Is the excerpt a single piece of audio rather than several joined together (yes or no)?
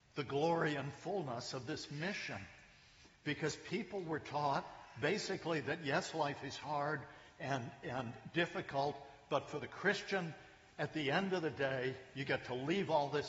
yes